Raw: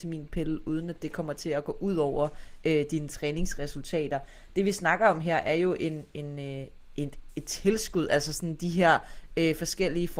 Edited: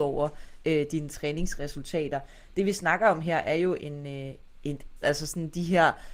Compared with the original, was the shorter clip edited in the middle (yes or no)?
yes